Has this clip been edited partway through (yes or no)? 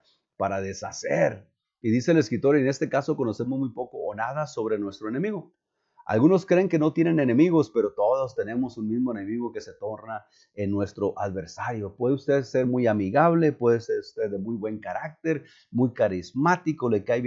no